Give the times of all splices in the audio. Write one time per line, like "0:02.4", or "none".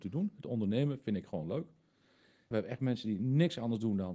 0:02.5